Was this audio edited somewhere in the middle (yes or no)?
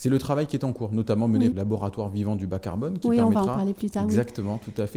yes